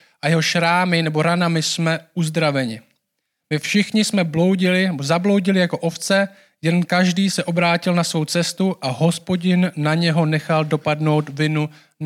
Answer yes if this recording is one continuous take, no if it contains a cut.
yes